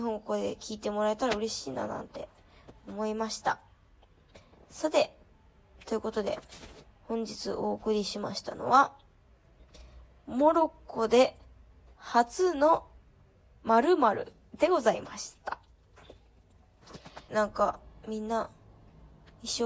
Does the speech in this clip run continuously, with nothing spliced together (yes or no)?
no